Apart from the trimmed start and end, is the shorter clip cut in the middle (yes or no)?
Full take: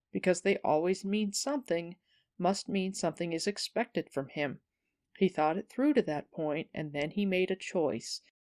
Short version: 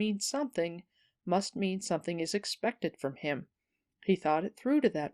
no